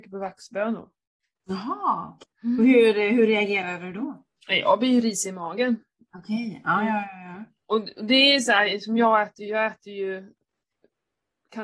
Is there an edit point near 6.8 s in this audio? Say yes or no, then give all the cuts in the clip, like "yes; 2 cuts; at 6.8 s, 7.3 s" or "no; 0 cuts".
no; 1 cut; at 2.2 s